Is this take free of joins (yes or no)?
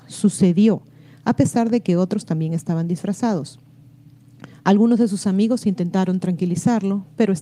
yes